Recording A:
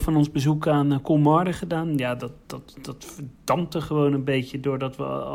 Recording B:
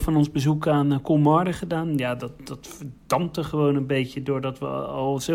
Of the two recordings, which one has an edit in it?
B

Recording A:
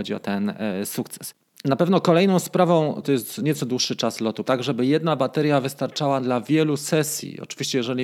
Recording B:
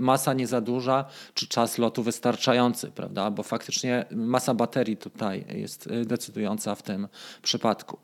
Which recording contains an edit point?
A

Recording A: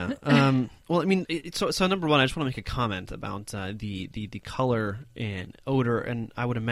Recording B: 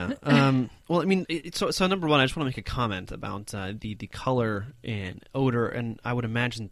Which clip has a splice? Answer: B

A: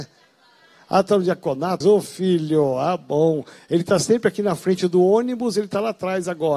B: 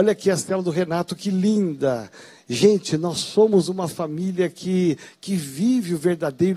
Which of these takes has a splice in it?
A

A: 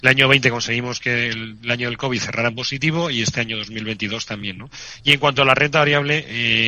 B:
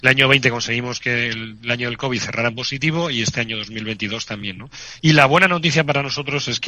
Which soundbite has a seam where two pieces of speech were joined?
B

